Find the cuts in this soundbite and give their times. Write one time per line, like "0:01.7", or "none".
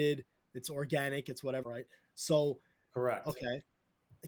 0:01.6